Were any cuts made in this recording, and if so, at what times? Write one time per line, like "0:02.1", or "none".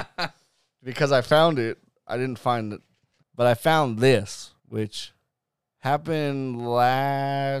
0:03.2
0:04.6